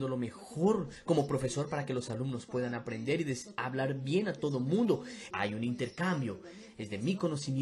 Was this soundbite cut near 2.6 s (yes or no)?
no